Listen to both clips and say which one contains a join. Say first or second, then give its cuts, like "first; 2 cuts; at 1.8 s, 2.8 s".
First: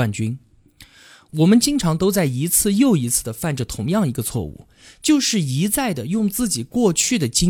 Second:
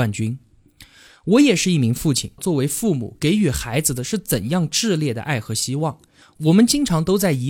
second; 3 cuts; at 1.1 s, 2.4 s, 6.2 s